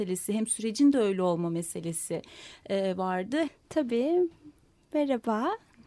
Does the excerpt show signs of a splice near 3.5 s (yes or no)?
yes